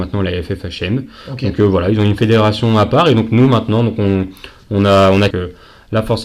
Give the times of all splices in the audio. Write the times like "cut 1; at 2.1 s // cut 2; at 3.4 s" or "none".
cut 1; at 5.3 s